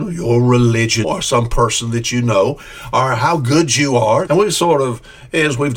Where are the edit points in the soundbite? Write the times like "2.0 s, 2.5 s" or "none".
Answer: 1.0 s, 4.3 s